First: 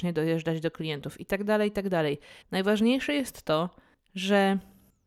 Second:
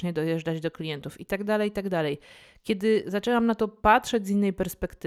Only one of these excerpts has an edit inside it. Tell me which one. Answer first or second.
first